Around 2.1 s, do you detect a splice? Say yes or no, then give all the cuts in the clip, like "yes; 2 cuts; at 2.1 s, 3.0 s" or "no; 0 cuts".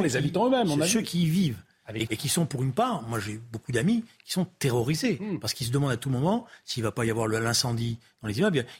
yes; 1 cut; at 2.1 s